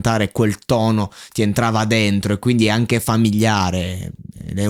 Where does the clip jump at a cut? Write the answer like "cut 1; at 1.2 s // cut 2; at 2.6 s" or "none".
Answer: none

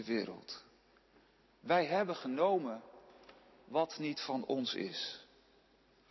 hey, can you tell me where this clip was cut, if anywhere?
none

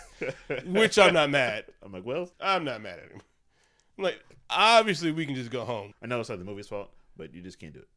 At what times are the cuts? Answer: cut 1; at 2.3 s // cut 2; at 5.9 s

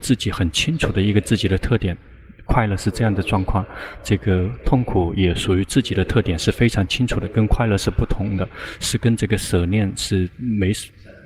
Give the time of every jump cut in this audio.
none

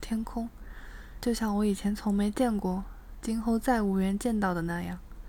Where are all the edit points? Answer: cut 1; at 1.2 s

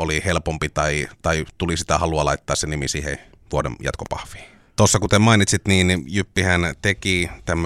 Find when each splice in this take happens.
cut 1; at 4.7 s

